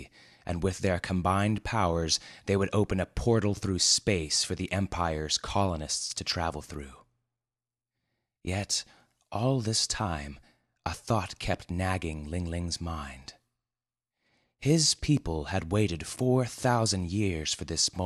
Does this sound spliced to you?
no; 0 cuts

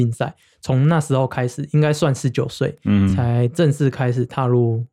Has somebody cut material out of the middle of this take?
no; 0 cuts

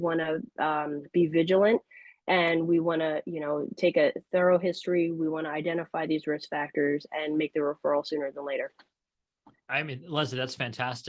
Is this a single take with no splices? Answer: yes; 0 cuts

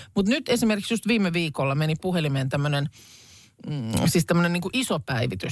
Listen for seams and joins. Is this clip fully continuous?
yes; 0 cuts

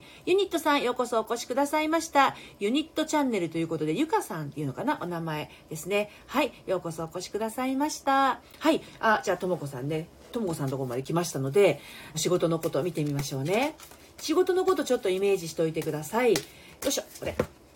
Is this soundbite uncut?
no; 2 cuts; at 12.1 s, 16.8 s

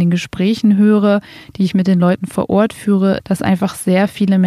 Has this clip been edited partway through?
yes; 1 cut; at 3.2 s

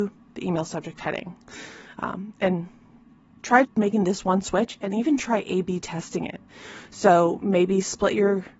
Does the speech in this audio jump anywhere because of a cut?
yes; 1 cut; at 3.6 s

